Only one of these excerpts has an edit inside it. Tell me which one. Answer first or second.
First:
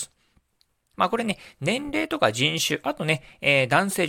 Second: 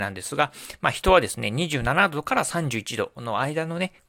first